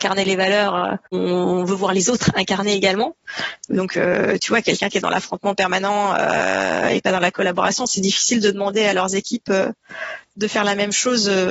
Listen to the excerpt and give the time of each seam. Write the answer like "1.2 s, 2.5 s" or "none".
none